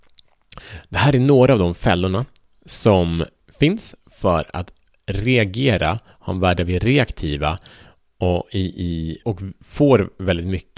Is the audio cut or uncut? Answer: cut